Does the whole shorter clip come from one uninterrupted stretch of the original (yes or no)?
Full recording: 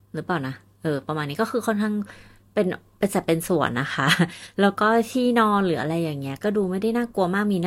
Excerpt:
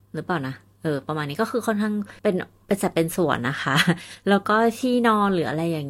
no